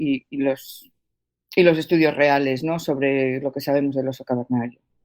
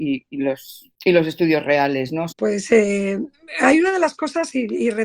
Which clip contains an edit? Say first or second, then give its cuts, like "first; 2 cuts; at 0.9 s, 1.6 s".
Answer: second; 2 cuts; at 0.9 s, 2.3 s